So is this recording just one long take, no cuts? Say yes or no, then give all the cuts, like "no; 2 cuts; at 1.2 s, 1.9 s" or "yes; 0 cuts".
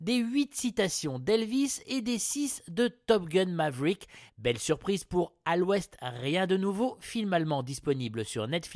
no; 1 cut; at 4.3 s